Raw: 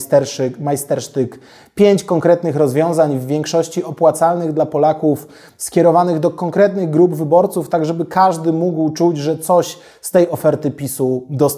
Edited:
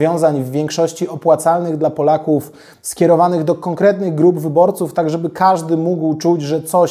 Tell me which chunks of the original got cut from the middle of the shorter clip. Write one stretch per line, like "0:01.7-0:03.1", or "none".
none